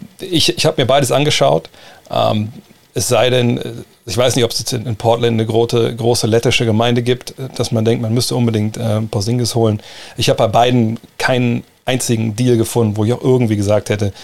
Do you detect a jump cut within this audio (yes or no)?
no